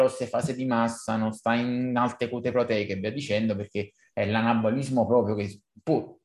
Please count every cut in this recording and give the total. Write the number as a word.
zero